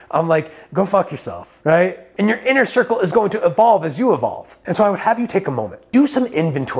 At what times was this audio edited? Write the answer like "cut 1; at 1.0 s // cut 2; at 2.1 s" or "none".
cut 1; at 2.1 s